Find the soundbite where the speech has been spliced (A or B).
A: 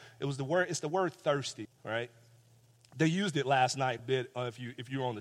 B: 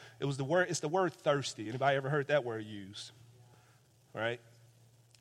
A